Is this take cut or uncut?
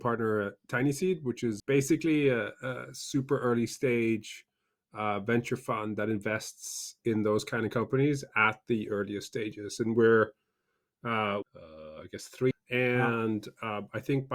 cut